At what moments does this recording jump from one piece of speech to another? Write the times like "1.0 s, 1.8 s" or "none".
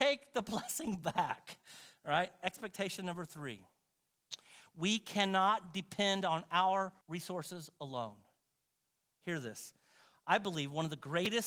7.0 s